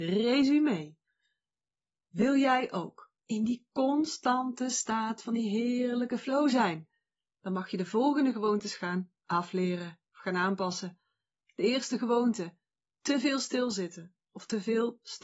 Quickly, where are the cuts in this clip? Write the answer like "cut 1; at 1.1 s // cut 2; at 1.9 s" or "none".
cut 1; at 3.2 s